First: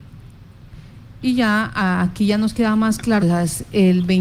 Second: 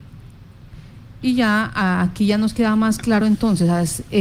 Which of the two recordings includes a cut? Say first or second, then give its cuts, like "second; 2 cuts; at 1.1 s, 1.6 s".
first; 1 cut; at 3.2 s